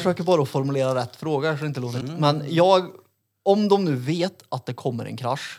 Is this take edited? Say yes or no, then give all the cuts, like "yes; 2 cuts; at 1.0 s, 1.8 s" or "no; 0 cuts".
yes; 1 cut; at 2.0 s